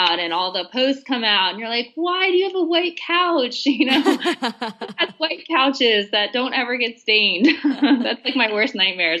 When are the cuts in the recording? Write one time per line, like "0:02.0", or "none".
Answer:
none